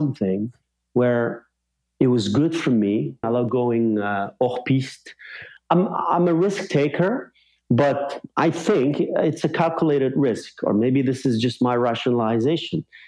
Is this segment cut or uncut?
cut